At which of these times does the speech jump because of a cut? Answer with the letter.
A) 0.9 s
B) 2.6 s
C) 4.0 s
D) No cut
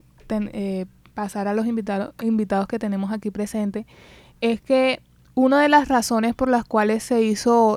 D